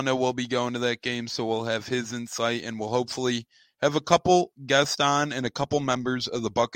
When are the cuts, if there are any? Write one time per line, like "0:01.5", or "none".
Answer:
none